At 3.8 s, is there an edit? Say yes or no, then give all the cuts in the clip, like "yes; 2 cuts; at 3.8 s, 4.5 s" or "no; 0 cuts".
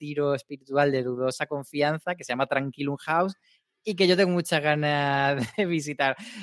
no; 1 cut; at 5.5 s